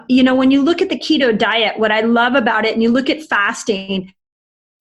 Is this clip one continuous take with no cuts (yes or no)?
yes